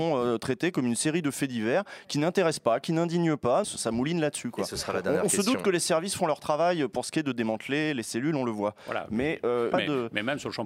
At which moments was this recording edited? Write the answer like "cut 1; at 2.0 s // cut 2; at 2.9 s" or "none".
cut 1; at 3.6 s // cut 2; at 9.7 s